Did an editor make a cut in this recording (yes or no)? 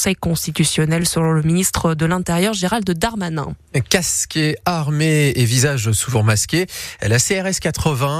no